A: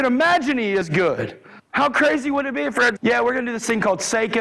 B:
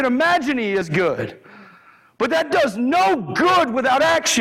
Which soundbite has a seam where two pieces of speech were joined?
A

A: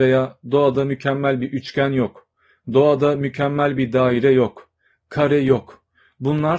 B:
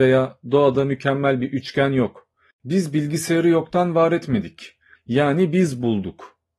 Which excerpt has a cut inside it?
B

